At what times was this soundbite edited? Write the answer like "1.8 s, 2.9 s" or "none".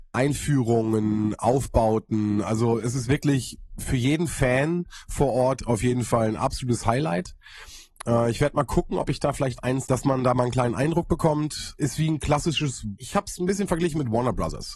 9.8 s